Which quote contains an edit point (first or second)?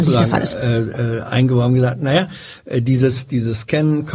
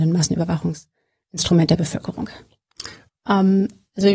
second